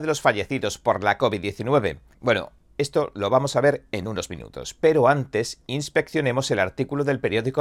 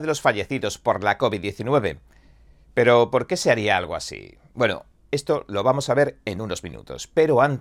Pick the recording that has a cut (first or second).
first